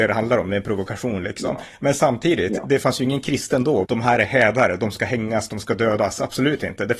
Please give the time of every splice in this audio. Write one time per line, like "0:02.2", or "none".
0:03.8